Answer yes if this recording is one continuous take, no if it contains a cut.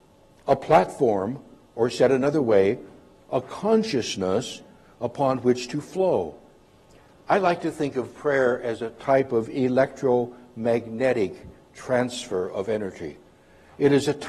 yes